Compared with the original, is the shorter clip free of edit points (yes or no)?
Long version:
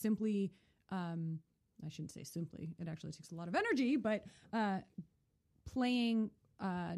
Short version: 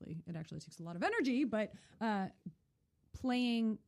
yes